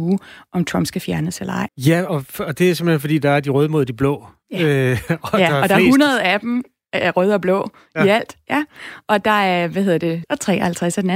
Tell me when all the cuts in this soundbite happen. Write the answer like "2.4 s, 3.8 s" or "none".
1.7 s, 10.2 s